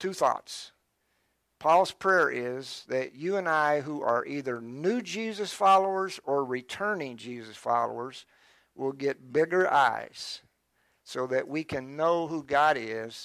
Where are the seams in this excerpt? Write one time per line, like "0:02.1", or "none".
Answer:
none